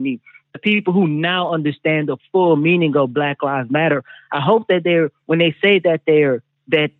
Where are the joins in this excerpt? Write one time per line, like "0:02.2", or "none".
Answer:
none